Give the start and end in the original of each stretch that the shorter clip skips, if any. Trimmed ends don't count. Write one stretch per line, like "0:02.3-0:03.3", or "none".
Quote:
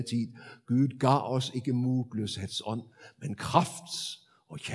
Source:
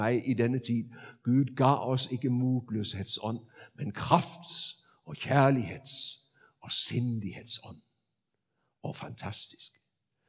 none